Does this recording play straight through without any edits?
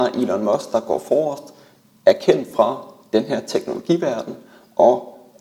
yes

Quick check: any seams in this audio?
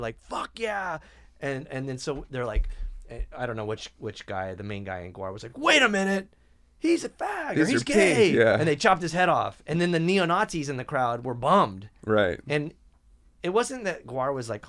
no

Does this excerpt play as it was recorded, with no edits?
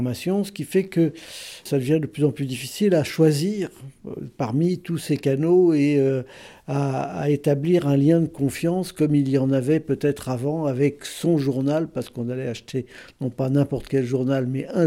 yes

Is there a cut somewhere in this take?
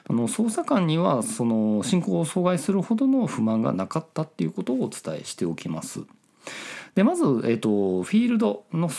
no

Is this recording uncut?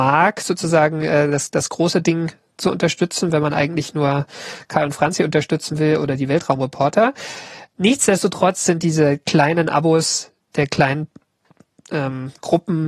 yes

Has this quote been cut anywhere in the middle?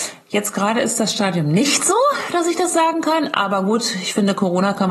no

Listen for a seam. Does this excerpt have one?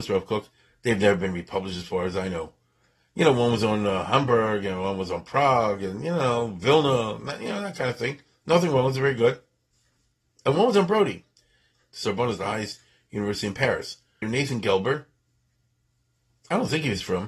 yes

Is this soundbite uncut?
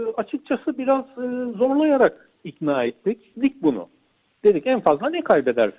no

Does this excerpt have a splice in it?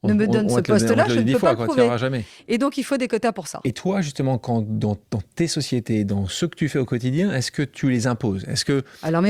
no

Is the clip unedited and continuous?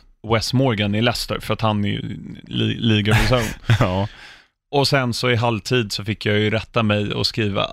yes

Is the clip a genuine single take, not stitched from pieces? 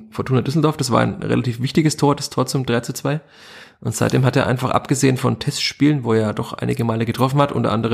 yes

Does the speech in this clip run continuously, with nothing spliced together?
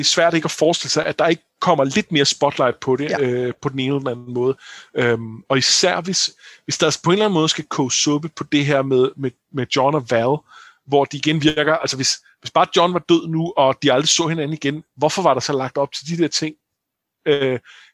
yes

